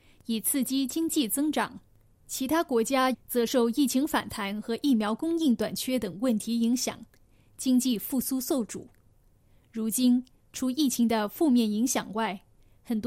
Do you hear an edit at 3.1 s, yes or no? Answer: yes